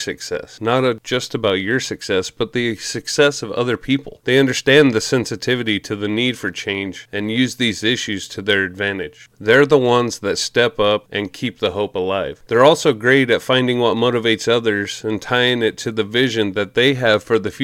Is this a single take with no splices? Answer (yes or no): no